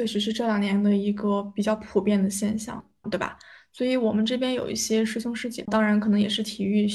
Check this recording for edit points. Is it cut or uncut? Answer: cut